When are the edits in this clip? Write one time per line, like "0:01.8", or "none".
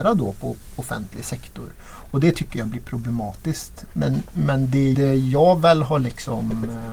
0:03.9
0:04.9